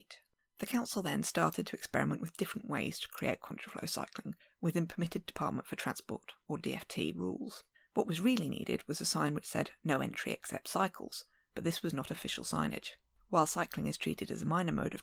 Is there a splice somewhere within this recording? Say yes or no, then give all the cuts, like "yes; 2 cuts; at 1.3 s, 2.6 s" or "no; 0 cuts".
no; 0 cuts